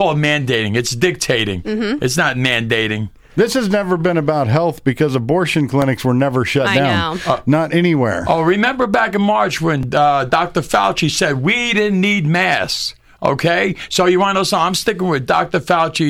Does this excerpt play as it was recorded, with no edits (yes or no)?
yes